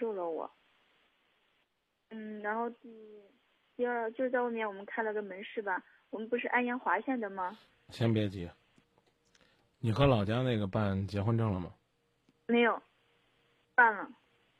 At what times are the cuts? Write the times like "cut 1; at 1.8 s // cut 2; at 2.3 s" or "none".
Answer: cut 1; at 13.6 s